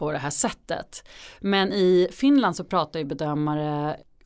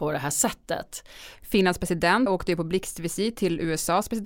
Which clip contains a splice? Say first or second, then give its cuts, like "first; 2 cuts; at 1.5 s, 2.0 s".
second; 1 cut; at 1.3 s